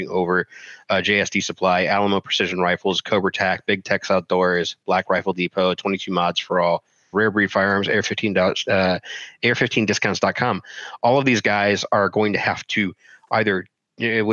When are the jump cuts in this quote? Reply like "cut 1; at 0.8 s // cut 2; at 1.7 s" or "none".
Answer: cut 1; at 7.1 s